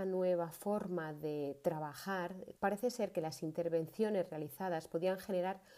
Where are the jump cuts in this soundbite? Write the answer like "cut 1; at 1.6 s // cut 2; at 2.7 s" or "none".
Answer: cut 1; at 2.6 s